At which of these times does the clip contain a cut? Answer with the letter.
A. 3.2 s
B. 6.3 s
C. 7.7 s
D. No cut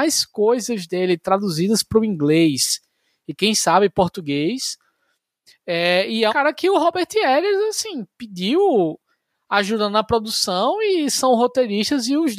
B